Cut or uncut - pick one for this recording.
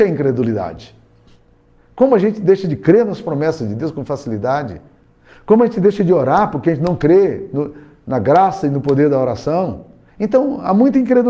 uncut